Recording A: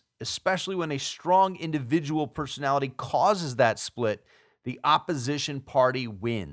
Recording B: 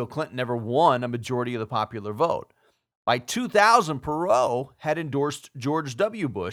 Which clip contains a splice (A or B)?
B